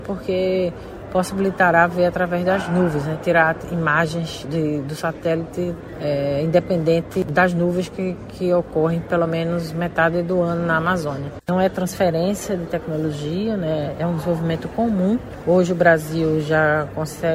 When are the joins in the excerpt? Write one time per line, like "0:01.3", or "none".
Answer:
0:11.4